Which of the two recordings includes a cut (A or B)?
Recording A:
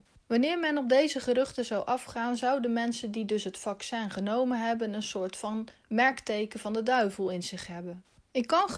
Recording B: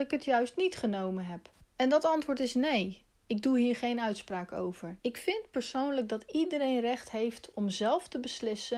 B